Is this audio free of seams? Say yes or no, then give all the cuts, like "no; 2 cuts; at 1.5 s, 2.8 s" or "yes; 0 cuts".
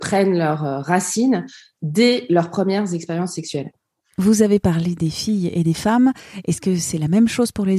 yes; 0 cuts